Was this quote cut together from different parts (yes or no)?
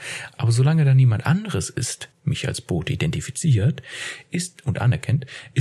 yes